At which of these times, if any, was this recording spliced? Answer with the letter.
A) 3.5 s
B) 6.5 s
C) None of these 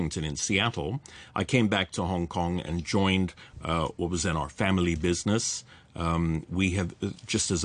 B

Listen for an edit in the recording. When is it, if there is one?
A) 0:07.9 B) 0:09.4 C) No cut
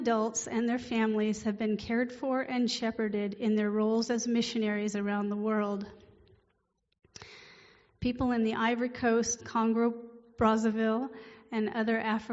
B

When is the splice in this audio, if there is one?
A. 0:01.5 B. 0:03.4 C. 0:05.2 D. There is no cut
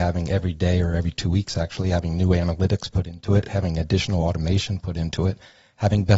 D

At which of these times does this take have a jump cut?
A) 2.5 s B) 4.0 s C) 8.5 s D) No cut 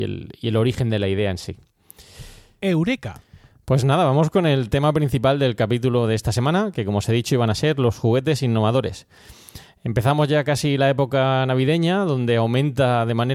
D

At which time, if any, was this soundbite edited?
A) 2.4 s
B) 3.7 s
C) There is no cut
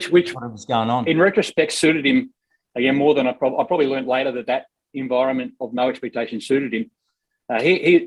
C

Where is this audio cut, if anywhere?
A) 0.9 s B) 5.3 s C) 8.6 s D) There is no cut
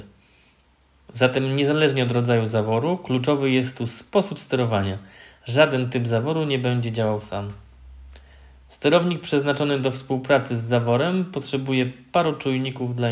D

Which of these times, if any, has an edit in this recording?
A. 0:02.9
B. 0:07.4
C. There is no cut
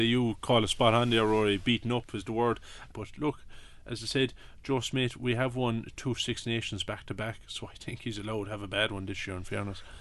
A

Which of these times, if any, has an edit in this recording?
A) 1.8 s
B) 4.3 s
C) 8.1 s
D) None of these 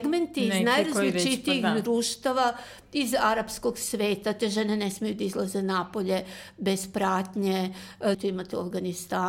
C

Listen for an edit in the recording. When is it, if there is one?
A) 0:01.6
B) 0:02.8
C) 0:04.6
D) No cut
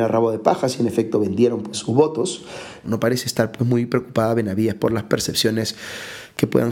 B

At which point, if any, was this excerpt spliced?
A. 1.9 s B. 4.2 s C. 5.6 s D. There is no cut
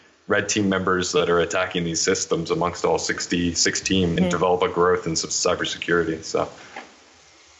B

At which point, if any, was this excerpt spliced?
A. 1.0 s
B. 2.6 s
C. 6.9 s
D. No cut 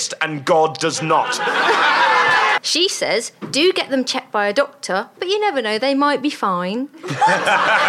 B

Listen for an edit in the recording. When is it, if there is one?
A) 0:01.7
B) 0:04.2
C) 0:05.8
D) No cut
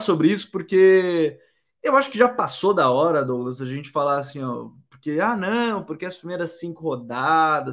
D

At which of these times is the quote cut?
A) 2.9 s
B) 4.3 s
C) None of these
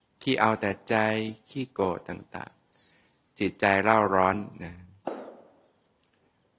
C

